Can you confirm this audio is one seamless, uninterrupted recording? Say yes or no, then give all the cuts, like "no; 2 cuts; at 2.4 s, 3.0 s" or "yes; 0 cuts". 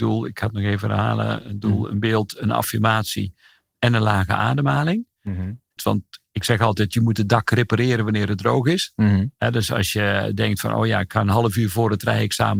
no; 1 cut; at 5.8 s